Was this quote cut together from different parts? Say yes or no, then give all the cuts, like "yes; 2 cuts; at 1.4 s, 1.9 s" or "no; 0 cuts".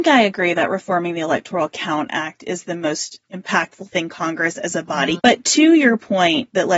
yes; 1 cut; at 5.2 s